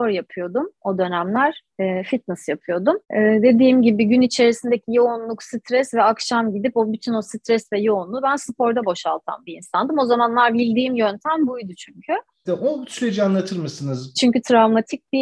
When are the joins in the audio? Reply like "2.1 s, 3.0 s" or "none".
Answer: 3.0 s, 12.5 s, 14.1 s